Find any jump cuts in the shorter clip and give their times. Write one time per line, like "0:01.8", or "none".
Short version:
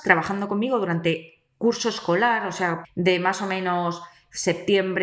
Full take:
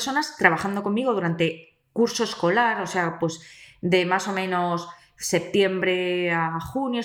0:02.8